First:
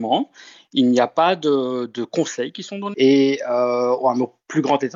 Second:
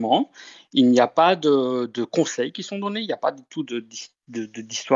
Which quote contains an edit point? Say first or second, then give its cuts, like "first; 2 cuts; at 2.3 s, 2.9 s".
first; 1 cut; at 2.9 s